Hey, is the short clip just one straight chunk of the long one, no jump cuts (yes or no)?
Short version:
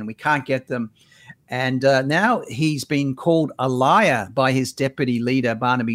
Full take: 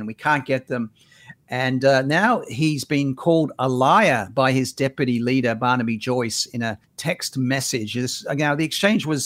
yes